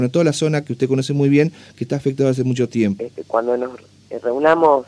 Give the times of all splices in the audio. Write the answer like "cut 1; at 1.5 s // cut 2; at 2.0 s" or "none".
cut 1; at 3.0 s

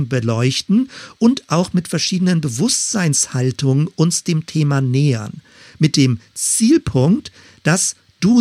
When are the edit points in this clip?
none

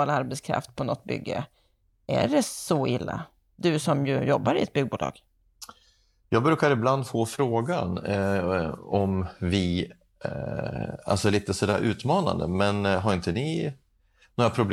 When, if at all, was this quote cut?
none

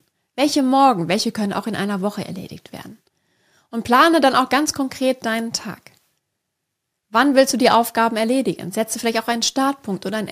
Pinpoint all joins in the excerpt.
none

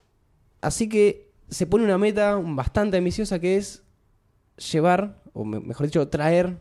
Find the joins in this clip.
none

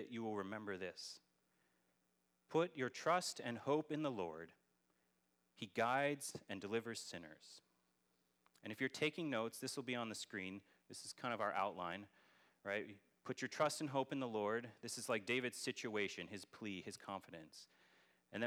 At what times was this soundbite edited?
none

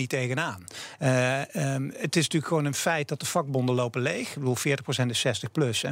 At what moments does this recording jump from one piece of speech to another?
none

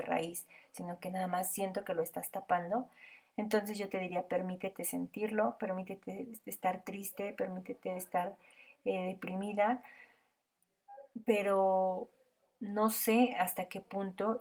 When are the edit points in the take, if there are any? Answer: none

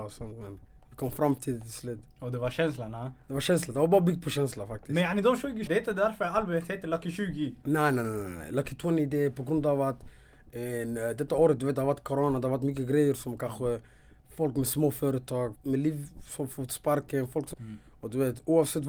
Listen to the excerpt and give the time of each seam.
cut 1; at 5.7 s // cut 2; at 15.5 s // cut 3; at 17.5 s

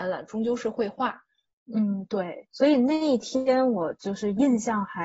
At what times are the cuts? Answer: cut 1; at 1.6 s

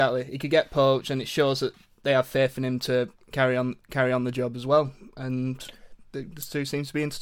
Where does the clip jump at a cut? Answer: none

